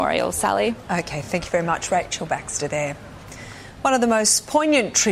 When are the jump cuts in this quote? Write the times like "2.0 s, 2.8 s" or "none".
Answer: none